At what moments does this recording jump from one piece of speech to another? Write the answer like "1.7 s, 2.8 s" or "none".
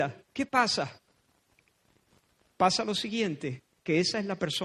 none